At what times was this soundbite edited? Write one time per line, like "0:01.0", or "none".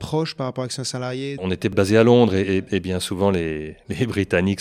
0:01.4